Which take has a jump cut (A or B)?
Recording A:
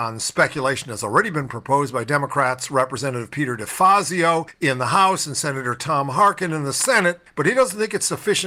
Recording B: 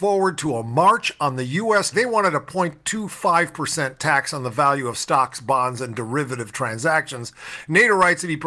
B